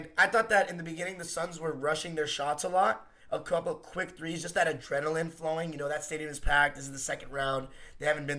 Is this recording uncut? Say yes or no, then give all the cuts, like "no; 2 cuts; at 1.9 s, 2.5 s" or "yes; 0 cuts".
yes; 0 cuts